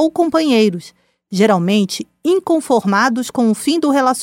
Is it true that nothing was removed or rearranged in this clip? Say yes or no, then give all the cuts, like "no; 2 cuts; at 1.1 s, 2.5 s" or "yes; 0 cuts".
yes; 0 cuts